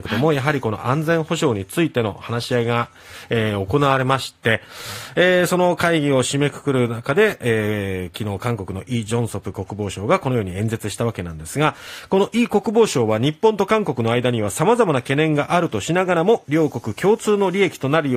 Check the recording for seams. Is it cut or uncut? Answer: uncut